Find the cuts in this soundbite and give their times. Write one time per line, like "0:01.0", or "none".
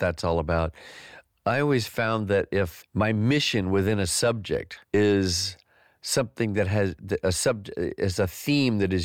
0:02.8
0:04.8